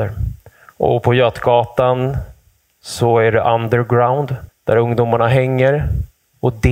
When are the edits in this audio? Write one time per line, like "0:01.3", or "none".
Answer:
0:04.5

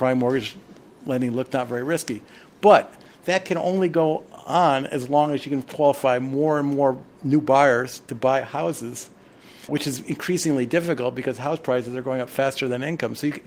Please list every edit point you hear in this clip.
0:09.7

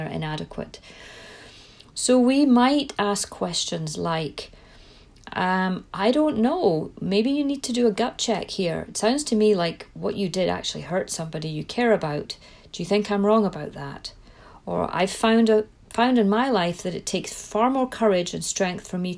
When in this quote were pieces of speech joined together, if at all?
none

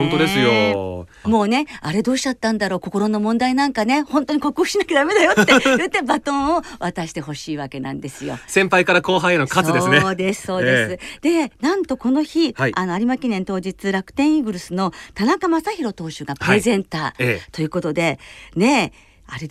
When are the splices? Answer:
0:01.2

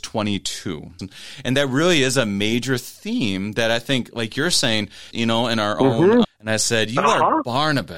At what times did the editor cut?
0:01.0
0:05.1
0:06.2

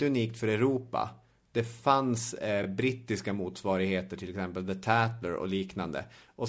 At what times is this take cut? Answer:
none

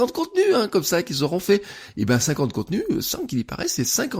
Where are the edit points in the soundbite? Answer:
none

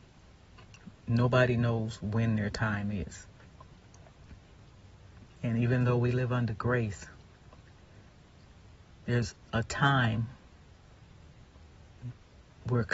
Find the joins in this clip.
0:05.2

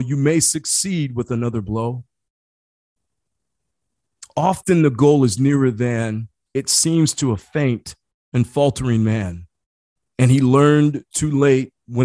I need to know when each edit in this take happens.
0:10.1

